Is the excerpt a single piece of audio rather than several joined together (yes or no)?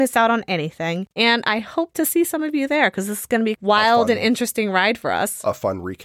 yes